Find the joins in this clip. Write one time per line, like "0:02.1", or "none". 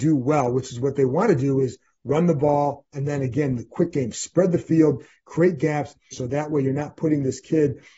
0:06.1